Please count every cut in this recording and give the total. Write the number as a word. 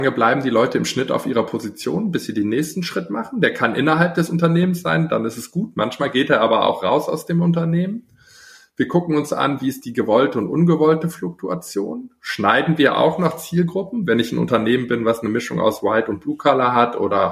zero